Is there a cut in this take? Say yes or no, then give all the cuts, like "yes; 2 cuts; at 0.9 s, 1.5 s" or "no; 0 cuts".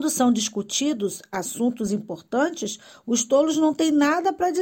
no; 0 cuts